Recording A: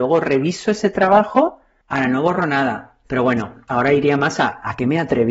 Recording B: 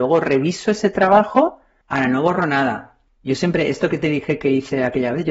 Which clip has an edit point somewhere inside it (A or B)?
A